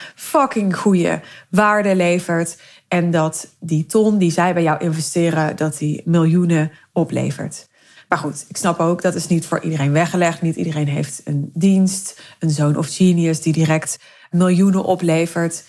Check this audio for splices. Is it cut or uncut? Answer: uncut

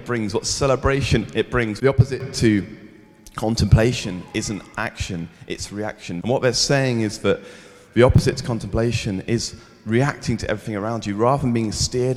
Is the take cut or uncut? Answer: cut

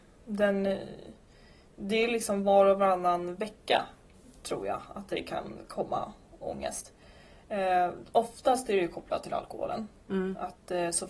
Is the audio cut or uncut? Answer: uncut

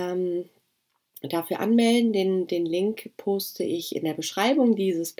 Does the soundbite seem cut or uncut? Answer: uncut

